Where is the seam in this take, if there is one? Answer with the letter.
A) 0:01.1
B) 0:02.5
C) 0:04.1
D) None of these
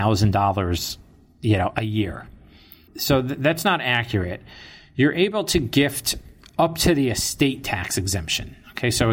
D